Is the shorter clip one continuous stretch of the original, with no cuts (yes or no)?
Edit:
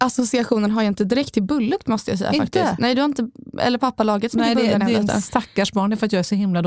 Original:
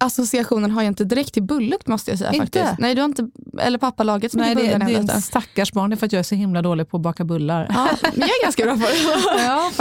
yes